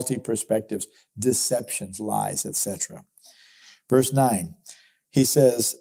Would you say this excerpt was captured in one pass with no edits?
yes; 0 cuts

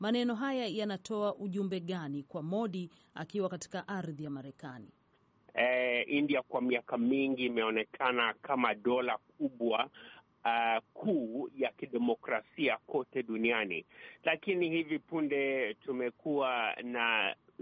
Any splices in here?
yes; 1 cut; at 5.5 s

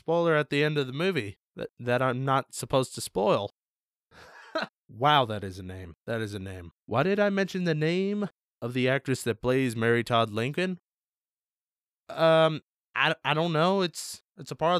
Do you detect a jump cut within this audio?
yes; 1 cut; at 4.7 s

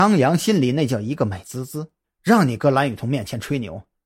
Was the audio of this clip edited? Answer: yes; 1 cut; at 2.0 s

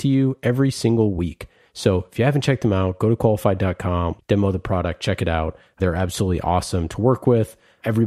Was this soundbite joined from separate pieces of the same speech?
yes; 1 cut; at 4.2 s

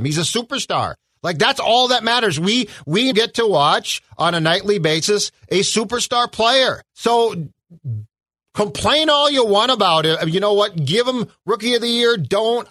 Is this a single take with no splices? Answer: no; 2 cuts; at 3.1 s, 6.9 s

